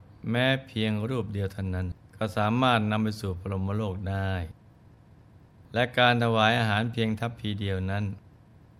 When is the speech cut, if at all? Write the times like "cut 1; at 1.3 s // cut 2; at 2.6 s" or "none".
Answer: cut 1; at 2.0 s